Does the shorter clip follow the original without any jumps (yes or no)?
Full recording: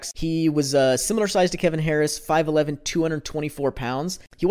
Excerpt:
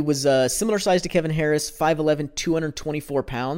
yes